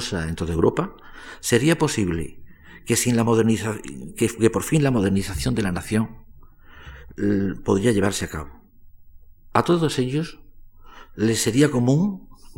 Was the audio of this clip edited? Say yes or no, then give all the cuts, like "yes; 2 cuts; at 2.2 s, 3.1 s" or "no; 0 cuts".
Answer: no; 0 cuts